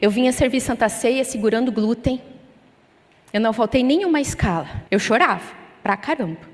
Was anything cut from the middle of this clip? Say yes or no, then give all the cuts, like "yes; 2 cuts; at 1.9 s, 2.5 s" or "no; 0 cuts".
yes; 1 cut; at 4.9 s